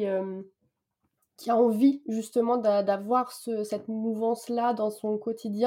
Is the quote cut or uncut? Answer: uncut